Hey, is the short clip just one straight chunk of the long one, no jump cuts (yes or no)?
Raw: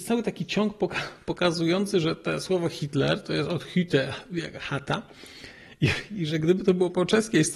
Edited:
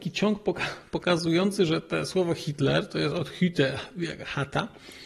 yes